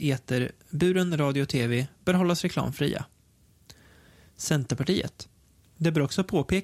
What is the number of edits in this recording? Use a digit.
1